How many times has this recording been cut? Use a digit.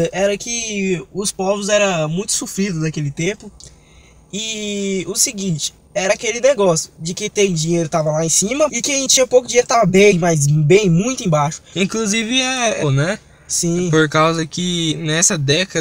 3